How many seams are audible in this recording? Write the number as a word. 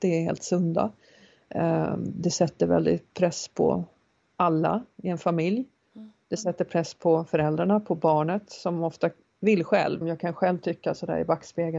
one